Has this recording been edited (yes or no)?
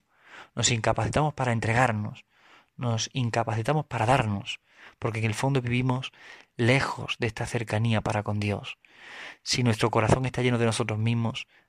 no